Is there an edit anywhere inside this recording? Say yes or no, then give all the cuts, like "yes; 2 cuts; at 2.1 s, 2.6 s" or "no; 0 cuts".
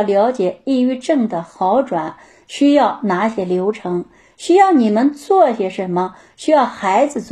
no; 0 cuts